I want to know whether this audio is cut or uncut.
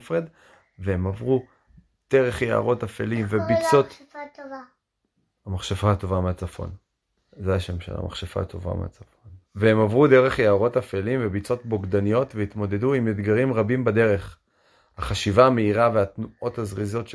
cut